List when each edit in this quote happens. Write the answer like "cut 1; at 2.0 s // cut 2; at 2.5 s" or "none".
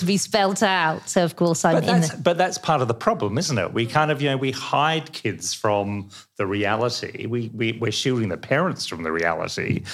none